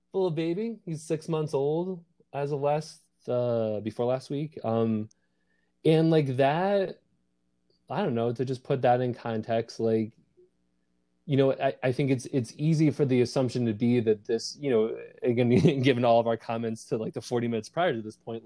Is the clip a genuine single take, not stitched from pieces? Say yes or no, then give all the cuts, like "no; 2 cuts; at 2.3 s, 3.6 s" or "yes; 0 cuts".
yes; 0 cuts